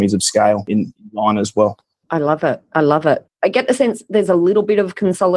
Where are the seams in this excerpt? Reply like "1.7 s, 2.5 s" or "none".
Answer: 3.4 s